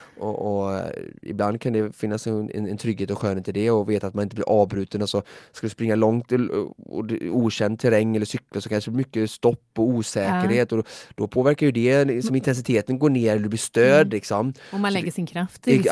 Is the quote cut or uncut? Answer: uncut